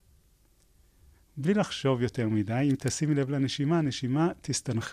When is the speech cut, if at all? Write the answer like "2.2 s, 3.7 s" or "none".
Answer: none